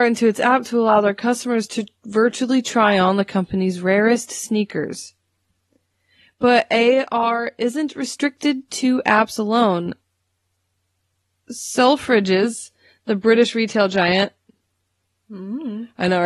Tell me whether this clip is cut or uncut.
uncut